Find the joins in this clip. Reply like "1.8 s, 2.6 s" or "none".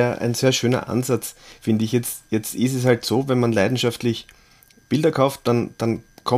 none